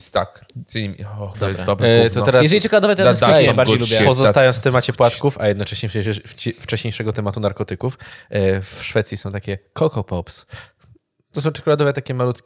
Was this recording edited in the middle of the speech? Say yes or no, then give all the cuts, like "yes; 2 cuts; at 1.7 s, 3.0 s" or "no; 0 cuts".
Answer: yes; 1 cut; at 1.3 s